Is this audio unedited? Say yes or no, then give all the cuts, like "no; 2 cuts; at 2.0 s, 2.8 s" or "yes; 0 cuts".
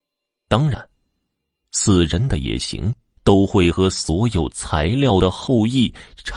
no; 1 cut; at 3.2 s